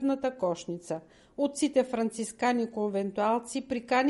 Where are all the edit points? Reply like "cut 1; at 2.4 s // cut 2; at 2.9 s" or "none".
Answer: none